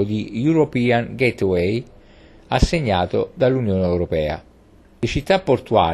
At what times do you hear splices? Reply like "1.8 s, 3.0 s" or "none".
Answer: 4.9 s